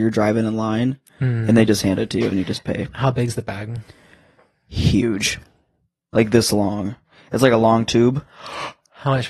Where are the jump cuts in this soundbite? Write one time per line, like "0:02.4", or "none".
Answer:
none